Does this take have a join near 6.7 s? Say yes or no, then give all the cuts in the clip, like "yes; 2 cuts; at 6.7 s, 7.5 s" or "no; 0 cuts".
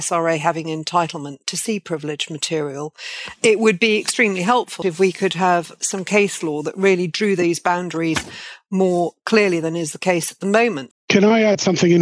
no; 2 cuts; at 4.8 s, 10.9 s